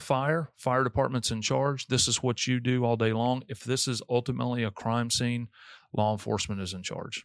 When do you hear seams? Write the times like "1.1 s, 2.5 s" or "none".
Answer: none